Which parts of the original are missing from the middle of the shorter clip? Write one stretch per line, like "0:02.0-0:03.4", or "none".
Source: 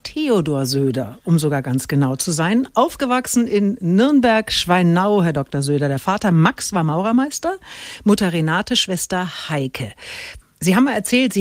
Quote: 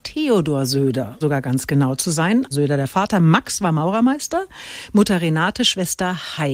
0:01.2-0:01.4
0:02.7-0:05.6

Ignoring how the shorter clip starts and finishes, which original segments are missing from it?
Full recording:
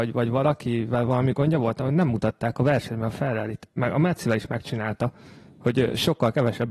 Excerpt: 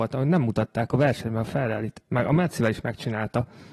none

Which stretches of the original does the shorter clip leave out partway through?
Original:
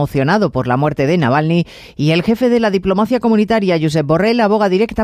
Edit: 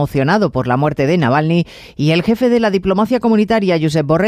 none

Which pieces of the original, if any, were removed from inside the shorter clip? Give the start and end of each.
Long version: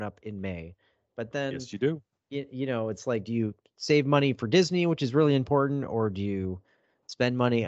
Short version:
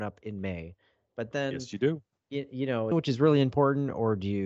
0:02.9-0:04.9

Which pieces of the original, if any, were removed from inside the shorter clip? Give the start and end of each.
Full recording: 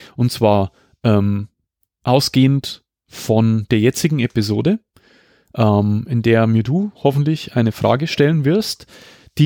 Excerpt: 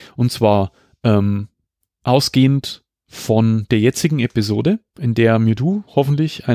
0:05.0-0:06.1

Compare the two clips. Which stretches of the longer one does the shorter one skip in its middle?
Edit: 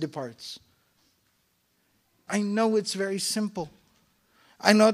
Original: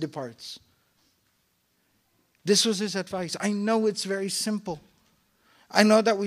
0:02.3-0:03.4

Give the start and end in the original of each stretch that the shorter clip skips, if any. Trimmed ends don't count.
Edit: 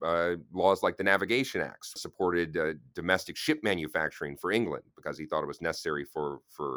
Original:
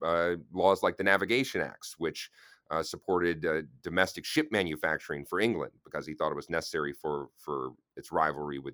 0:02.0-0:02.8

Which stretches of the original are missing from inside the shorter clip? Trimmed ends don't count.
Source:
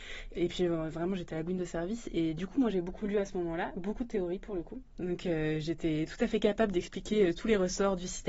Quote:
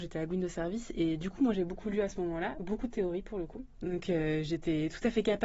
none

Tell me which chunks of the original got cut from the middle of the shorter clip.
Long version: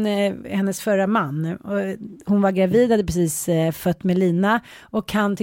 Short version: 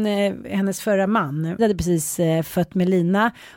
0:01.6-0:02.9

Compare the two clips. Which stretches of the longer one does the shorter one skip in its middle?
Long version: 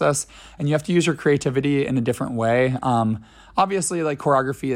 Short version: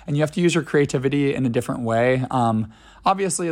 none

